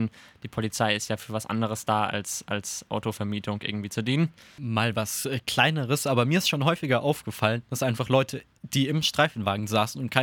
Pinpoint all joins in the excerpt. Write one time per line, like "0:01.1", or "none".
none